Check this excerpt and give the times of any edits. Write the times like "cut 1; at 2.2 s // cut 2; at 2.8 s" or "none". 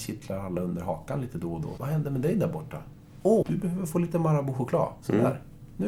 cut 1; at 1.8 s // cut 2; at 3.4 s